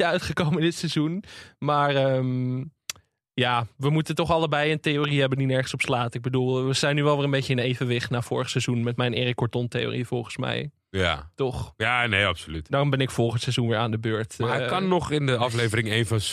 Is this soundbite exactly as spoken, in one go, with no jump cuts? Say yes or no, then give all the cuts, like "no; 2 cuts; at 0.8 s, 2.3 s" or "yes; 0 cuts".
yes; 0 cuts